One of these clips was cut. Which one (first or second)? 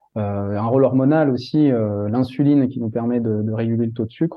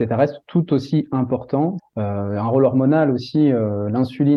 second